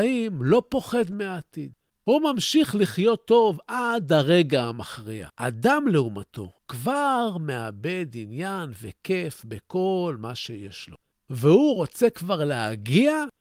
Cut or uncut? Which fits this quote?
cut